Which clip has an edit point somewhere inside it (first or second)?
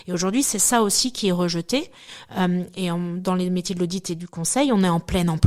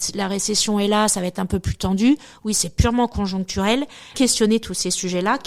second